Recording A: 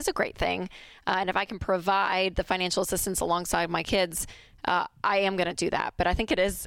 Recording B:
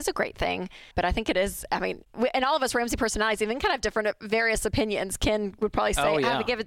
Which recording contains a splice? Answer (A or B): B